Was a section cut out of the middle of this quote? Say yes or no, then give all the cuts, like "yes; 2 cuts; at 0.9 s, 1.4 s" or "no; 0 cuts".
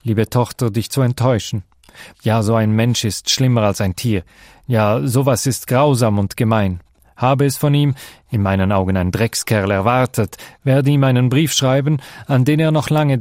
yes; 1 cut; at 2.1 s